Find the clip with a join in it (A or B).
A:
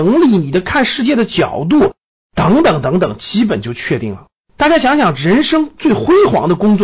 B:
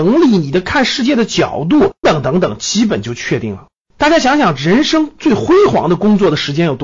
B